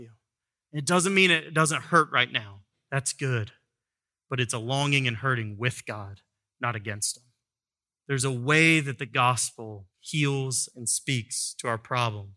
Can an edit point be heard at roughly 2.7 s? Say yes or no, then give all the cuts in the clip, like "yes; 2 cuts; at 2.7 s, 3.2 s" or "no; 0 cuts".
yes; 3 cuts; at 2.7 s, 7.9 s, 9.9 s